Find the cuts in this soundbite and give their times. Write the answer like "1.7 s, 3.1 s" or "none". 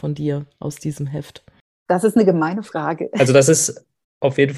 none